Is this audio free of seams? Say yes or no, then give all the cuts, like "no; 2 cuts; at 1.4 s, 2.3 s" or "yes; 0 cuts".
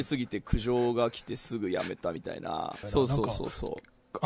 no; 1 cut; at 2.8 s